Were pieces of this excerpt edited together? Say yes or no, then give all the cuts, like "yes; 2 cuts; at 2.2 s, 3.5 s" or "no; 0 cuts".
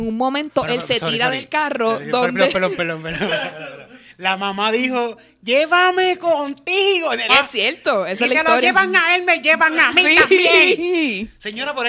yes; 1 cut; at 7.3 s